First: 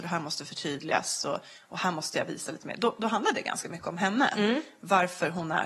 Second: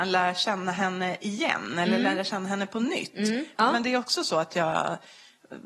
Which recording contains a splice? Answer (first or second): second